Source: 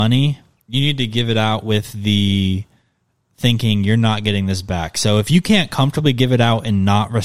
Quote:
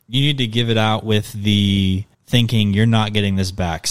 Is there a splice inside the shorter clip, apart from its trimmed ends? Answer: yes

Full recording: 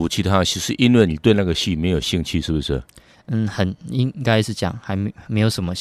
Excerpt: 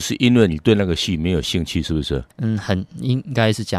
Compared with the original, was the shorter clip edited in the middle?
yes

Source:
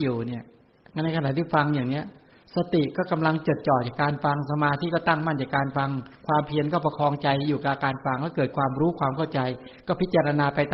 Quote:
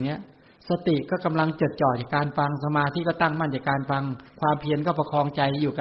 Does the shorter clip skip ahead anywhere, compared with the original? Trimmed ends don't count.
no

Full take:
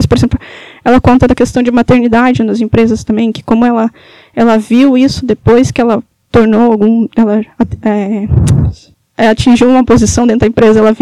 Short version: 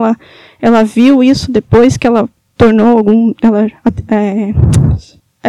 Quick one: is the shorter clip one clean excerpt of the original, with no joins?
yes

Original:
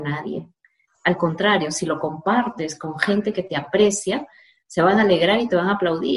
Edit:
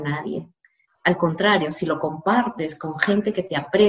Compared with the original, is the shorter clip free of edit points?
yes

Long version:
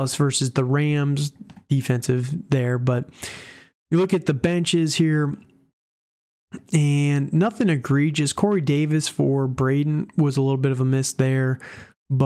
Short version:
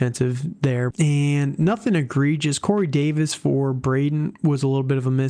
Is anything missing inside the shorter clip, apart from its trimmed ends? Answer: yes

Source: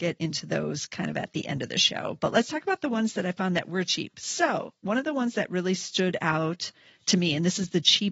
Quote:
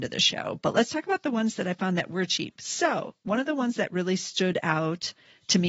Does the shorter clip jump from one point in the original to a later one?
no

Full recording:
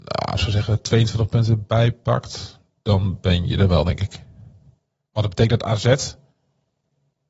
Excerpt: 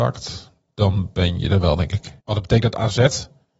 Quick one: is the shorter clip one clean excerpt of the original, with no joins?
no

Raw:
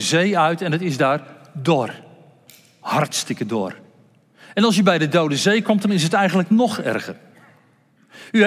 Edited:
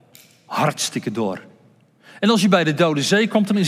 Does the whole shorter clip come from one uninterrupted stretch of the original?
yes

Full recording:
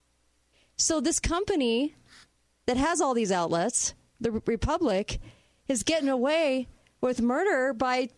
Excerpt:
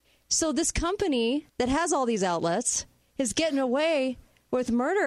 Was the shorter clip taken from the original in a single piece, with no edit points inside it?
no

